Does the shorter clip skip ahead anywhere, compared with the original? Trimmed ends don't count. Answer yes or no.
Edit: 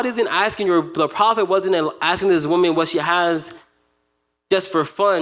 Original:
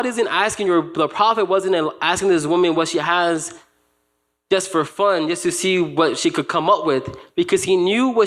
no